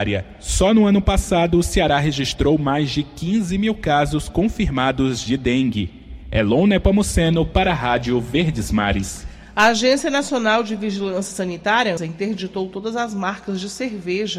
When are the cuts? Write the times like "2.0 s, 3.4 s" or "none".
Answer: 12.0 s